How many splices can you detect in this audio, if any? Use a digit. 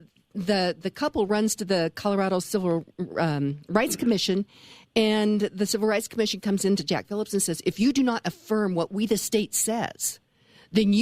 0